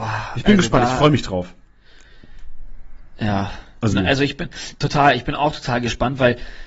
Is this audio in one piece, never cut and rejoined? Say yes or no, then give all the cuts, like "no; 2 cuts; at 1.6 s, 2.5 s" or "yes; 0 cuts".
no; 1 cut; at 3.9 s